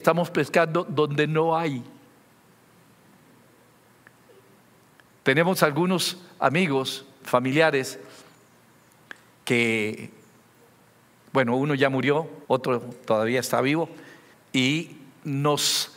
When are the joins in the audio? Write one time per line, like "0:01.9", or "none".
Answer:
0:12.4
0:14.3